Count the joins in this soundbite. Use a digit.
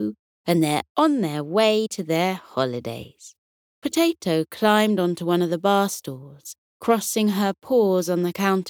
1